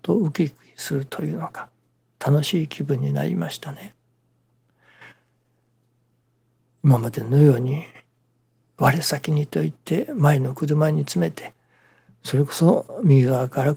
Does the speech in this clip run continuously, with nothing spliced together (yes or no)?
yes